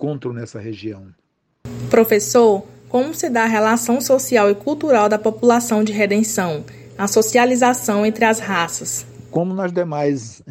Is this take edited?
no; 0 cuts

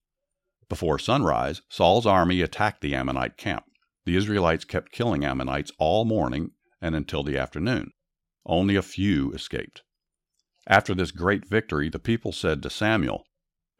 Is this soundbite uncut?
yes; 0 cuts

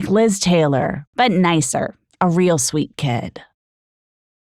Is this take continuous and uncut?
no; 1 cut; at 1.1 s

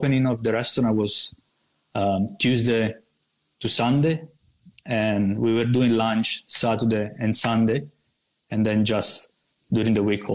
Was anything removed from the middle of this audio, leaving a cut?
no; 0 cuts

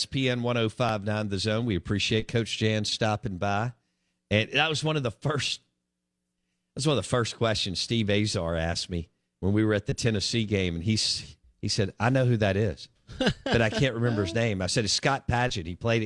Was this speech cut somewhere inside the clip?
no; 0 cuts

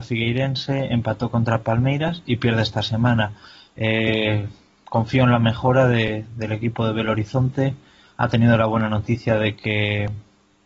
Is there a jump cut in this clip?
no; 0 cuts

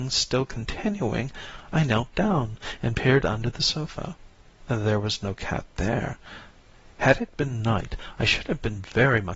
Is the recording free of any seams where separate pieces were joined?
yes; 0 cuts

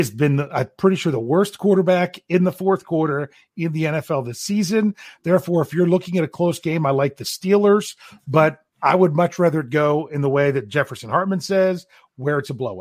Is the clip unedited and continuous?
yes; 0 cuts

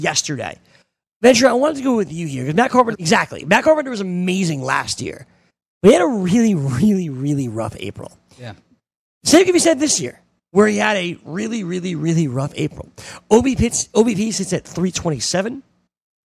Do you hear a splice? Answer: yes; 1 cut; at 2.9 s

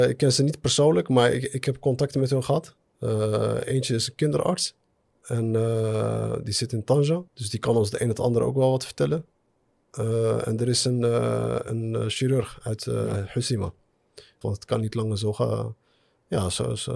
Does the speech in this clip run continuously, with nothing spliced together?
no; 2 cuts; at 7.3 s, 14.4 s

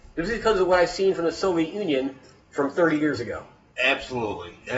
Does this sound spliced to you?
yes; 1 cut; at 3.7 s

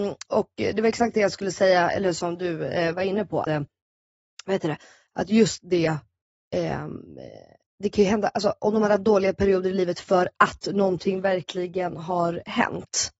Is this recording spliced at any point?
yes; 1 cut; at 3.4 s

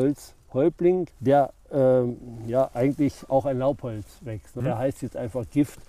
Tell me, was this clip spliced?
yes; 2 cuts; at 1.1 s, 4.6 s

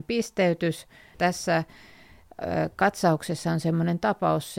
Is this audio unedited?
no; 1 cut; at 1.1 s

